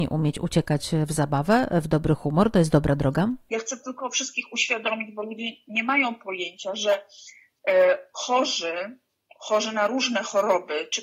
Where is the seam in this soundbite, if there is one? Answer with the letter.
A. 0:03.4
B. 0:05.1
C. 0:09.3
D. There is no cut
D